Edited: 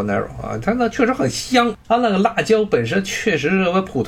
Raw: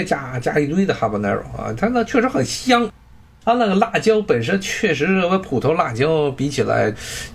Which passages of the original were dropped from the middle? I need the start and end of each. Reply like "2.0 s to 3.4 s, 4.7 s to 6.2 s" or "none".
3.0 s to 3.4 s